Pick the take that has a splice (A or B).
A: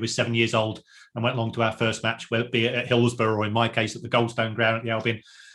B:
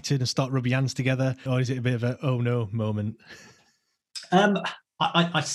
B